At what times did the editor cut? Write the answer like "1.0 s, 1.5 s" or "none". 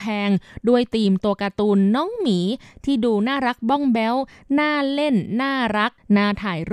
none